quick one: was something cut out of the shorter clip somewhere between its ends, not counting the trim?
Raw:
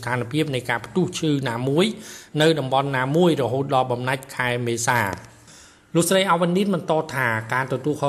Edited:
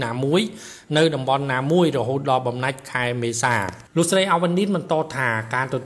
yes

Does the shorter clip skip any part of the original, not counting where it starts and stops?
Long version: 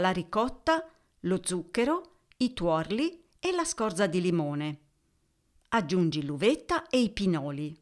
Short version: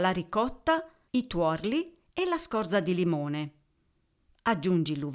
yes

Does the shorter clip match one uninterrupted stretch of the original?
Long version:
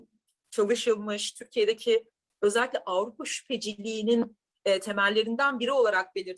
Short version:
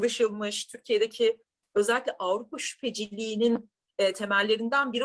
yes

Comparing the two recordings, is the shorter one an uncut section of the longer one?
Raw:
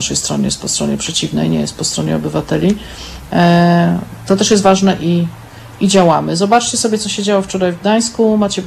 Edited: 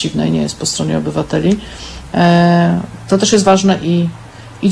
yes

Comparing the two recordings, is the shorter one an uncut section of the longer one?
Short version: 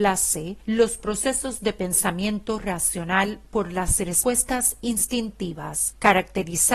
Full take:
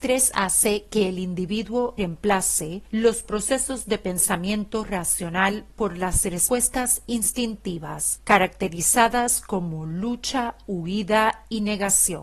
yes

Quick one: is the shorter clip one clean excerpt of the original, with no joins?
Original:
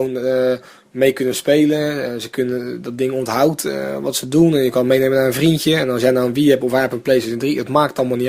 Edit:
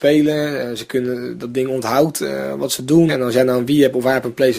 no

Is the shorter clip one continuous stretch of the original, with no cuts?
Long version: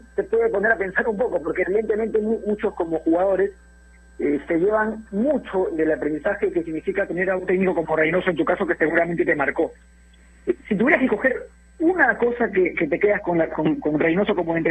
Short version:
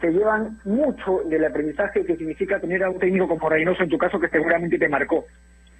yes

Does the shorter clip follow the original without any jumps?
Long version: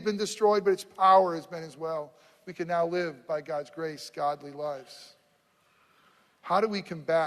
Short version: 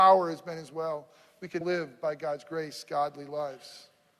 no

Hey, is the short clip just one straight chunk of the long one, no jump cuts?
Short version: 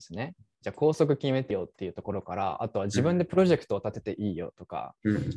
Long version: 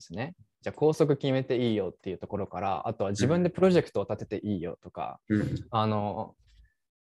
no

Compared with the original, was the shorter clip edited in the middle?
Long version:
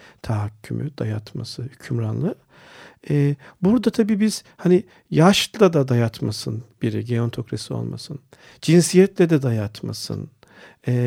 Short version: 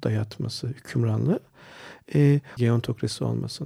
yes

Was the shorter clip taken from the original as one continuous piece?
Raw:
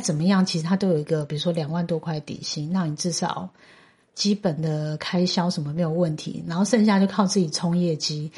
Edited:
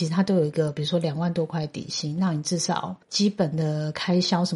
no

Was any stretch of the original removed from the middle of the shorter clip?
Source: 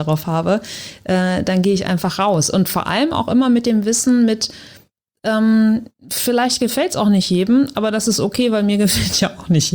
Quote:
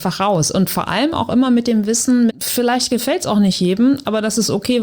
yes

